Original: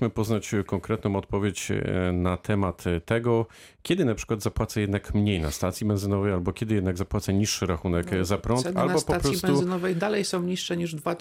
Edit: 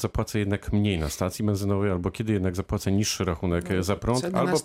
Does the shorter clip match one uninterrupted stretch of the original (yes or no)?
yes